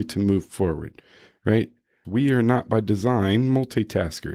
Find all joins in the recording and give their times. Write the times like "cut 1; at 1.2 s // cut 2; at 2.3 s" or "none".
cut 1; at 2.0 s